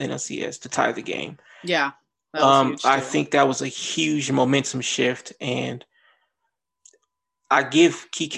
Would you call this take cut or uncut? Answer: uncut